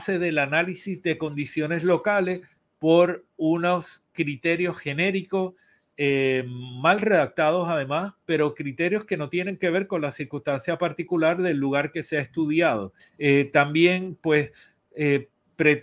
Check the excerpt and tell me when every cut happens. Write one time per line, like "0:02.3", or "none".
0:13.0